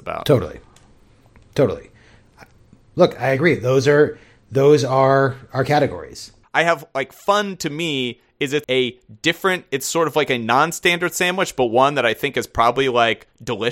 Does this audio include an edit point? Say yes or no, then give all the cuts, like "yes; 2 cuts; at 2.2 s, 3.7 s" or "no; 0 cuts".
yes; 2 cuts; at 6.4 s, 8.6 s